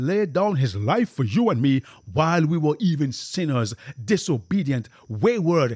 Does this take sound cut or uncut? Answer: uncut